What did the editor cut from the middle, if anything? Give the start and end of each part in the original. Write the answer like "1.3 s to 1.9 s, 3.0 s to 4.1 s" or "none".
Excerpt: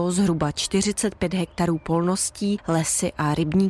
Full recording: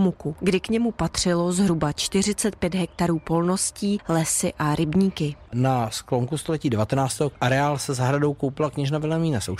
none

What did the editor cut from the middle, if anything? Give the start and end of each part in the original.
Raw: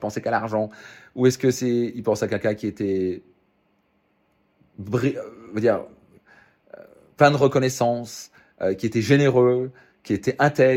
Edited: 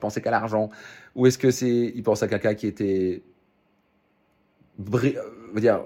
none

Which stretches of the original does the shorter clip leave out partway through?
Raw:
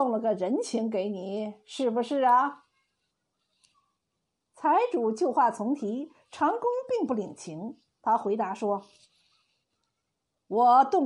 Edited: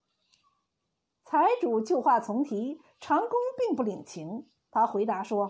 none

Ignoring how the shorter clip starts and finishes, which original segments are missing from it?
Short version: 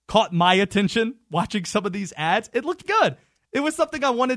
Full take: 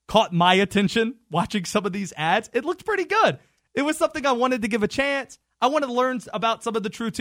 2.8 s to 3.1 s

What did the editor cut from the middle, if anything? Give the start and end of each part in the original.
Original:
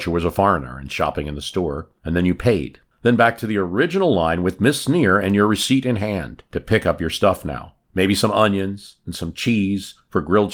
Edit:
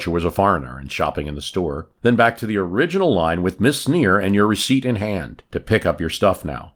2.0 s to 3.0 s

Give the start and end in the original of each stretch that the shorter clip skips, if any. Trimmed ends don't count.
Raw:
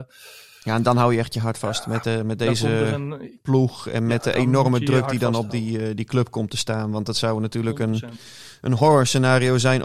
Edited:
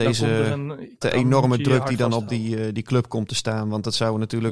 3.4 s to 4.2 s

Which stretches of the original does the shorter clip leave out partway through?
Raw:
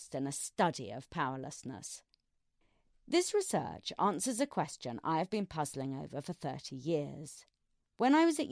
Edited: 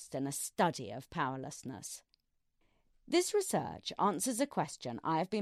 none

